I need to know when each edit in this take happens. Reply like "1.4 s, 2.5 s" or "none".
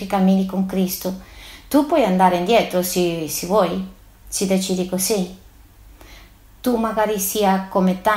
none